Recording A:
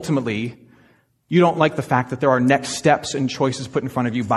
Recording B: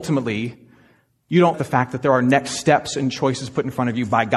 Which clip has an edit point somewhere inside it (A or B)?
B